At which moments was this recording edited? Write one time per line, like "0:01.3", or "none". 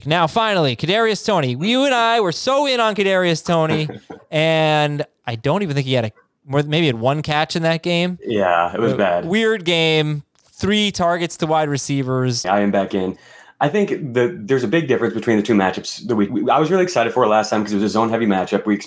0:12.4
0:16.3